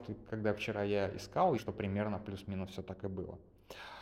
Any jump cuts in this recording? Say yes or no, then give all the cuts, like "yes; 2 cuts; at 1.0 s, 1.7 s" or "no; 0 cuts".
yes; 1 cut; at 1.6 s